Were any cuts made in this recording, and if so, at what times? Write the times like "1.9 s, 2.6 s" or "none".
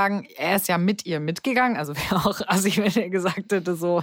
none